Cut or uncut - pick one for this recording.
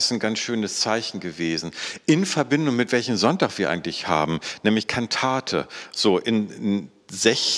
uncut